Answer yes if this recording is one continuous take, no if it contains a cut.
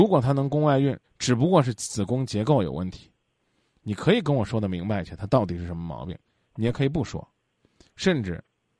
no